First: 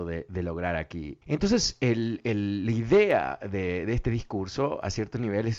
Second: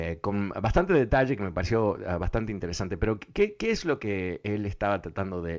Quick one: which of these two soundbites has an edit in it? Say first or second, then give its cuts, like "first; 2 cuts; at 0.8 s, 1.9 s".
first; 1 cut; at 1.2 s